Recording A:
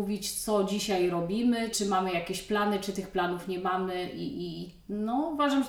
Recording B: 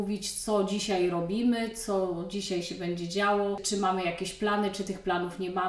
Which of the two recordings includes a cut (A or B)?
A